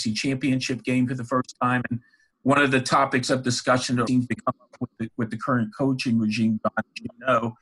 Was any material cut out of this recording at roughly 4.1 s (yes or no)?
yes